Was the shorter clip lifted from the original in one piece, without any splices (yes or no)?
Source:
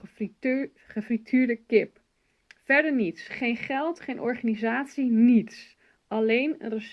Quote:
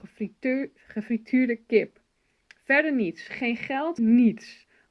no